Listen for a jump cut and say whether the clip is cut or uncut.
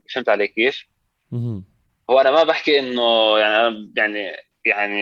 uncut